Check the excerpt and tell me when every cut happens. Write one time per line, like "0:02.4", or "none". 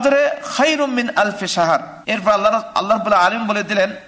0:02.0